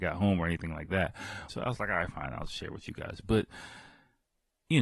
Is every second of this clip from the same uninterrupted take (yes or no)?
no